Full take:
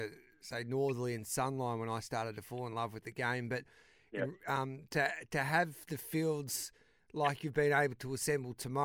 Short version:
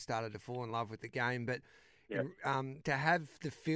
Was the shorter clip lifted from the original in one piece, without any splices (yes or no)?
no